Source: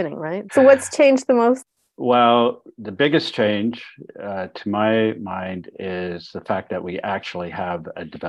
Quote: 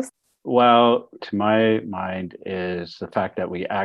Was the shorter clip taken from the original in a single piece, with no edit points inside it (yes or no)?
no